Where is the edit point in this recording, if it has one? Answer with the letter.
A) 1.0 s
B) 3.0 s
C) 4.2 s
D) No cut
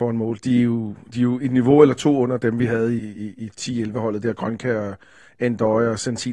B